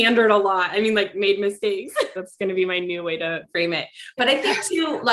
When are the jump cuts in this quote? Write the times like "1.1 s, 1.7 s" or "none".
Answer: 2.2 s, 4.2 s